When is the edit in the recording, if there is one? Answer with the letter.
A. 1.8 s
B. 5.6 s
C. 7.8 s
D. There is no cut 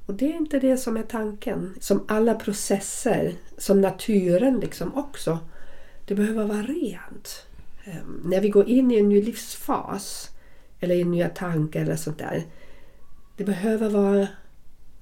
A